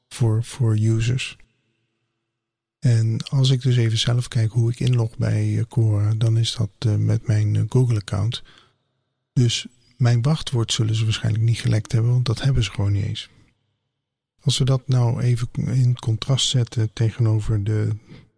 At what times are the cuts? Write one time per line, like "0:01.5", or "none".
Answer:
none

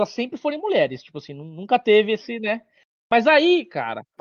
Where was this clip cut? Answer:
none

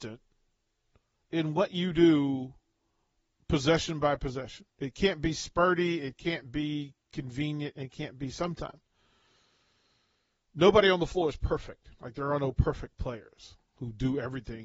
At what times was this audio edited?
0:04.7

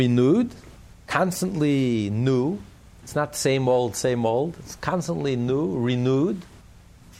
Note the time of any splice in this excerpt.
0:03.0

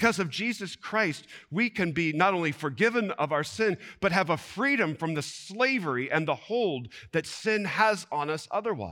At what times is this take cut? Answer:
none

